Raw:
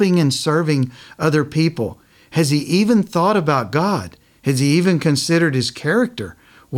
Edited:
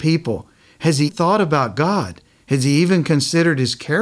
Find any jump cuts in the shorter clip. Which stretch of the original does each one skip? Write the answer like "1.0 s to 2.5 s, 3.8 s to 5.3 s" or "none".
2.6 s to 3.0 s